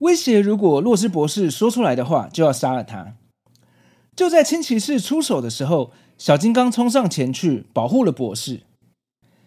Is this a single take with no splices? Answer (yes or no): yes